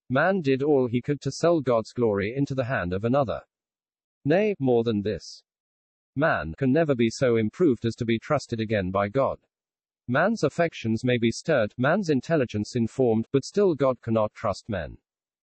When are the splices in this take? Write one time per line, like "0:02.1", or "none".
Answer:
0:04.2
0:06.6
0:13.3